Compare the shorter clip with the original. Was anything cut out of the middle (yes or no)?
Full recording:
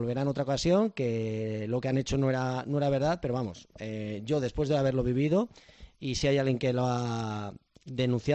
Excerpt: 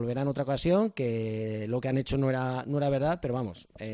no